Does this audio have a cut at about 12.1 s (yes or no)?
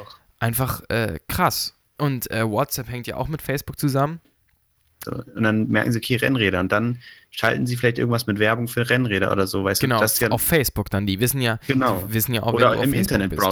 no